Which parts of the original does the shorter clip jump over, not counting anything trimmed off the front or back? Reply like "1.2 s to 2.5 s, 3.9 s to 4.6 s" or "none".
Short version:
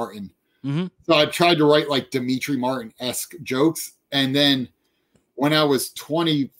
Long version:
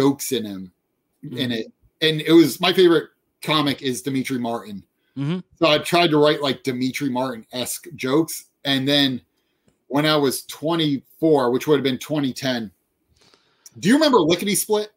none